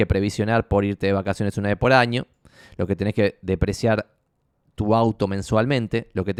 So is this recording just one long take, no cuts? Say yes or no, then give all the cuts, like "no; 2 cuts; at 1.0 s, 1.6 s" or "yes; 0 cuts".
yes; 0 cuts